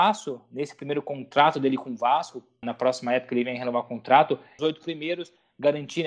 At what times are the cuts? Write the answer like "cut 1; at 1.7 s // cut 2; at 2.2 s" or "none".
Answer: cut 1; at 2.6 s // cut 2; at 4.6 s